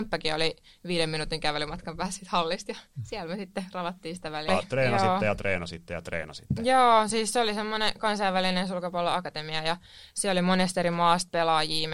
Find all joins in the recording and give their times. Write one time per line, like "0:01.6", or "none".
0:04.5